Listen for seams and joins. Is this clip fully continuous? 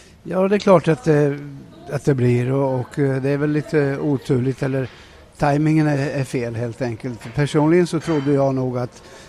yes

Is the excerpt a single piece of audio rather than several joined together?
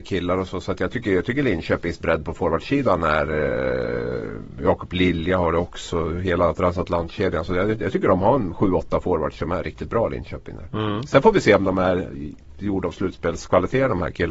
yes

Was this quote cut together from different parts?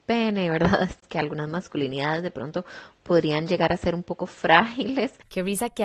no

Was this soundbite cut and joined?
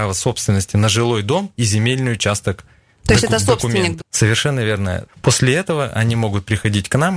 yes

